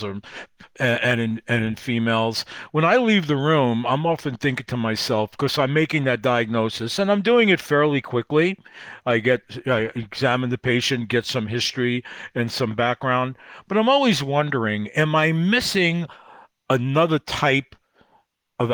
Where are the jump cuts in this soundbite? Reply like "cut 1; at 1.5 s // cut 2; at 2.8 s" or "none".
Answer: none